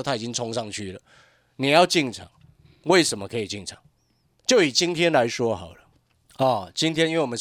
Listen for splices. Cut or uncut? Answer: uncut